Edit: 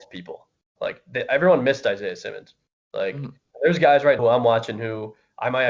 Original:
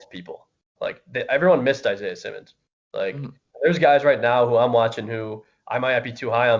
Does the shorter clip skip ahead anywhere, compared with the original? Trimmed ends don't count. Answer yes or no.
yes